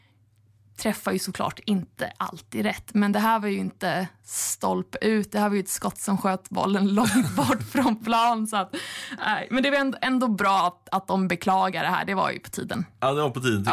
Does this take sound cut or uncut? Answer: uncut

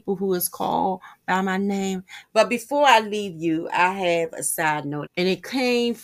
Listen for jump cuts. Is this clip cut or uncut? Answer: cut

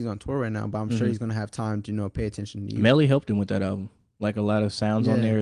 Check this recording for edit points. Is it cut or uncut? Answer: uncut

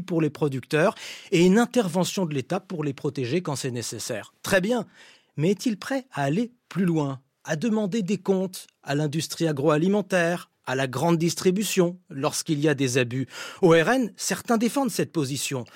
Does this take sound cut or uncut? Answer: uncut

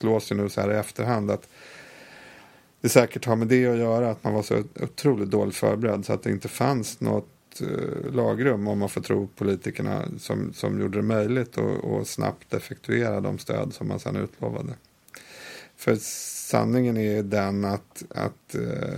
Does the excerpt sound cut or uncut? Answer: uncut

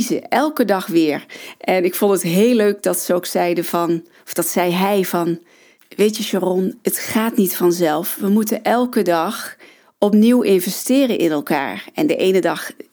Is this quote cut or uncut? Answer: uncut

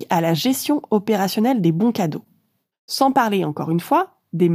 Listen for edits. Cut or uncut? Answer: cut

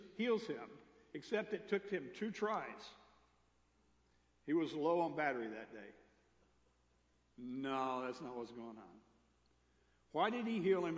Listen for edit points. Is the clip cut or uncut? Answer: uncut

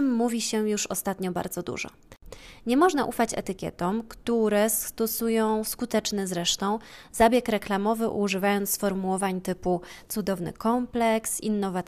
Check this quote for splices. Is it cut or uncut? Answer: uncut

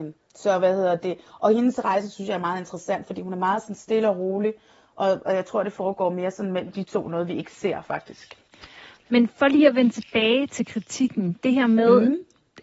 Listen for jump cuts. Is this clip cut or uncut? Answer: uncut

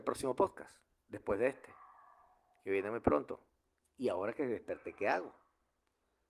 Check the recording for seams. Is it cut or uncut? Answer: uncut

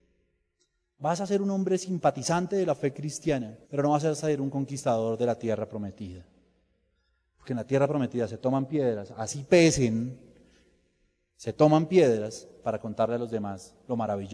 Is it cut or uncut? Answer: cut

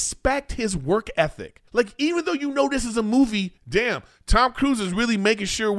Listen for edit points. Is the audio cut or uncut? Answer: cut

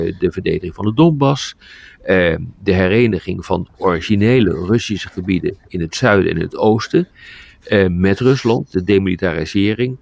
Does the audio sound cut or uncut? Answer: uncut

